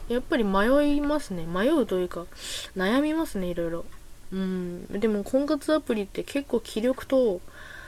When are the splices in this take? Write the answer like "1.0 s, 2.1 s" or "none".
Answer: none